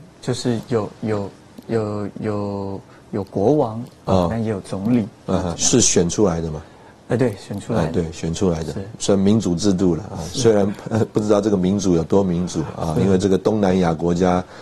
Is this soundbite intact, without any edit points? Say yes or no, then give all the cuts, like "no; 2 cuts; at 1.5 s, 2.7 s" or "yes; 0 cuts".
no; 1 cut; at 5.5 s